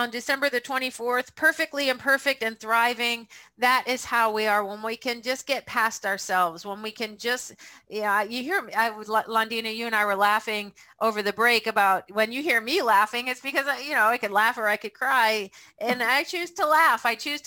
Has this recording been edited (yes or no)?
no